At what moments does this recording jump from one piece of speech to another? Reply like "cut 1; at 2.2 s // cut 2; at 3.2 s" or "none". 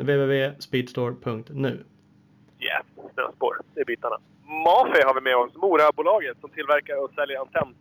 cut 1; at 4.3 s